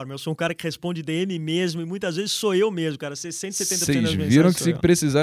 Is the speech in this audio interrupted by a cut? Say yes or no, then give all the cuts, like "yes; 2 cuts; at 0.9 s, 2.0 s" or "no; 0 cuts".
no; 0 cuts